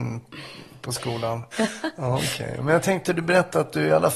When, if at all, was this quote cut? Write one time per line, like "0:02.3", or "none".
0:01.5